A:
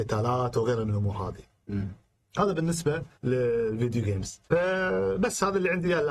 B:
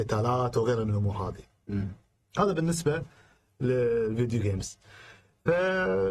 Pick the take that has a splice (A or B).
A